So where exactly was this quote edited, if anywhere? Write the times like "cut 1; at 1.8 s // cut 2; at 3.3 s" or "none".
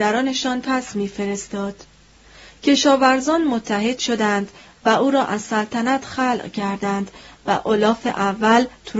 none

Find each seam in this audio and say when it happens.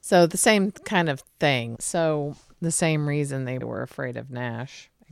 cut 1; at 1.7 s // cut 2; at 3.6 s

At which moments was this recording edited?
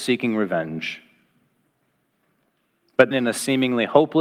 cut 1; at 3.1 s

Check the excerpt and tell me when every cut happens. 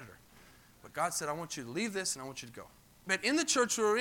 cut 1; at 3.0 s

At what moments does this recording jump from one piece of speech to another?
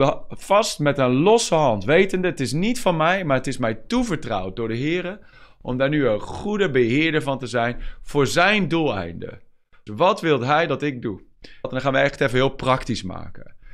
cut 1; at 9.9 s // cut 2; at 11.6 s

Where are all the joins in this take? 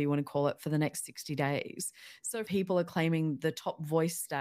cut 1; at 2.5 s

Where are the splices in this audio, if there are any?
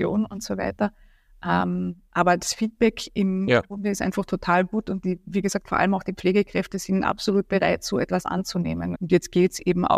cut 1; at 8.9 s

